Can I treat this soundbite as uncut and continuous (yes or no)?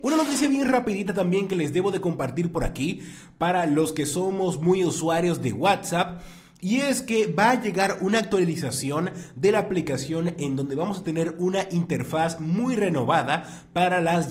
yes